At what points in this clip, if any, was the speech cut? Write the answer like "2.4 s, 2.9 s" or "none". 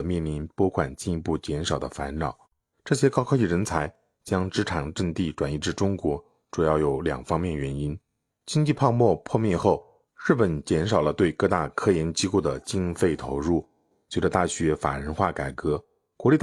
2.7 s, 8.3 s

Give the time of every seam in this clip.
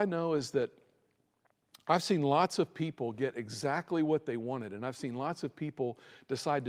none

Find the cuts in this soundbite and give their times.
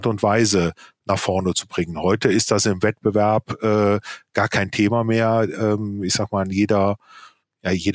none

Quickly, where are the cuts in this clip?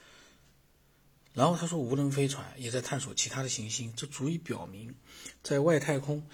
none

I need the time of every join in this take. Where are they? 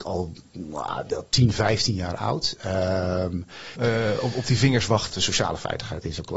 3.8 s, 5.1 s

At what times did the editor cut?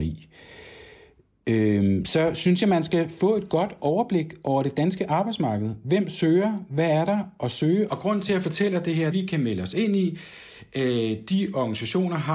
7.9 s, 9.1 s

